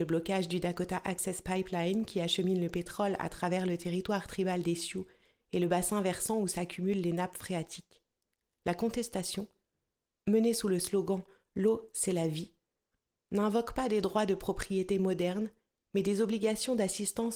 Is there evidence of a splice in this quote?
no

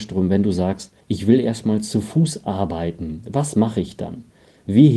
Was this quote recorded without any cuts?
no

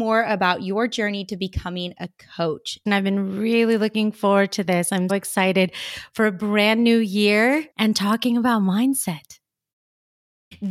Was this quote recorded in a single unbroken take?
no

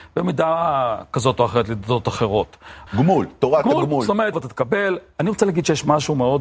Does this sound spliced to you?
yes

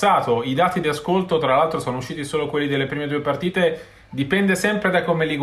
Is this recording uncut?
yes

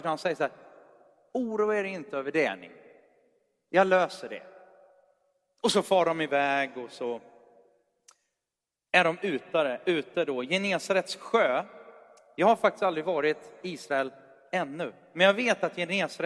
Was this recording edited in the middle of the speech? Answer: no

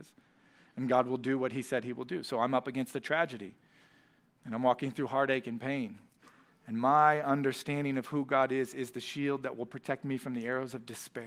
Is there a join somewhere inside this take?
no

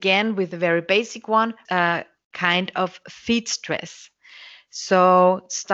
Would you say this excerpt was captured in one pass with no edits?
no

